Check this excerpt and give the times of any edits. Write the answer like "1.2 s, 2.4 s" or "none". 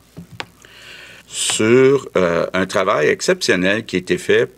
1.2 s

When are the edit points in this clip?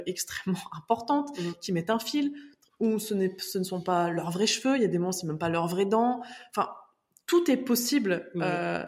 none

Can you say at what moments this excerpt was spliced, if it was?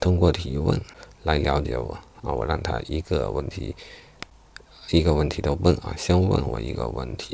none

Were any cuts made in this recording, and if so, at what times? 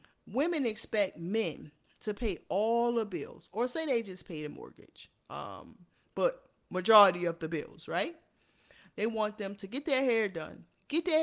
none

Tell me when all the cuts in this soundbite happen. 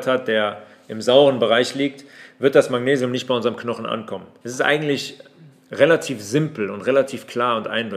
4.4 s

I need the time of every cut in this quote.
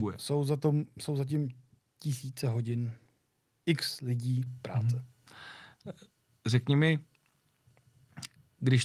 none

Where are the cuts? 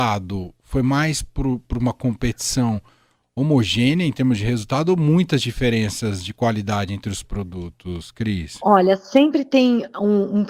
none

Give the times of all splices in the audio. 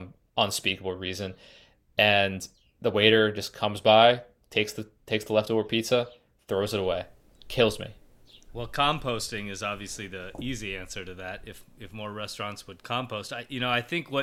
none

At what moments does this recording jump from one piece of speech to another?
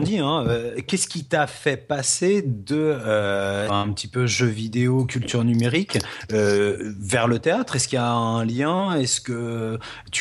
3.7 s

